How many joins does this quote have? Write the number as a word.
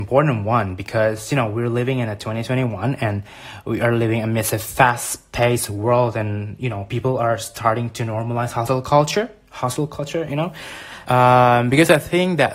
one